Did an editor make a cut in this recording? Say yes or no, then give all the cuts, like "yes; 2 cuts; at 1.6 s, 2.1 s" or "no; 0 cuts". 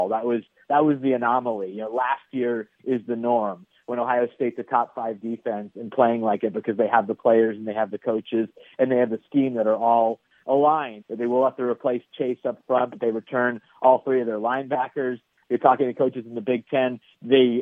yes; 2 cuts; at 11.0 s, 15.4 s